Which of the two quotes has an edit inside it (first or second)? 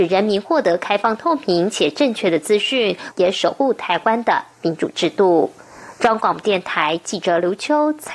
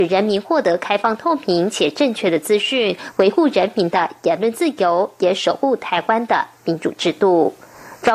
first